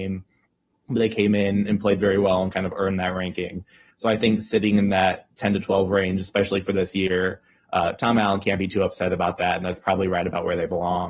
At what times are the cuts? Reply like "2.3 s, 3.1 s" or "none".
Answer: none